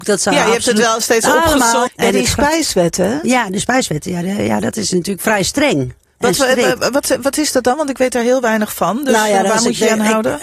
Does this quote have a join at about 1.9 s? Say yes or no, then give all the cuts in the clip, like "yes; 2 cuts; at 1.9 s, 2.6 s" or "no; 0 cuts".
yes; 1 cut; at 1.9 s